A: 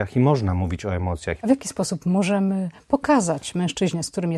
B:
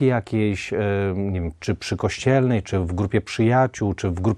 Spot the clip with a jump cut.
A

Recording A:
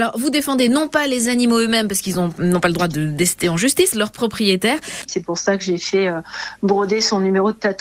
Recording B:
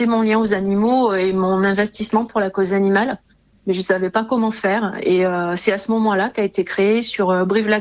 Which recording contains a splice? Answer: A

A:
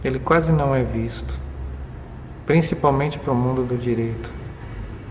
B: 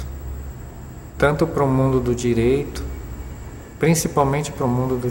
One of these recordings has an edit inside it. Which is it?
A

